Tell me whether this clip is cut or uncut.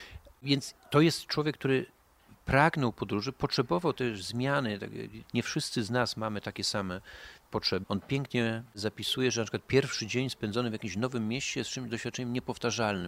cut